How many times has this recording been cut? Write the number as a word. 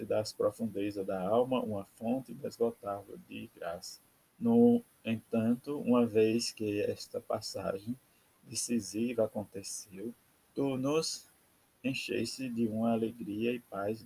one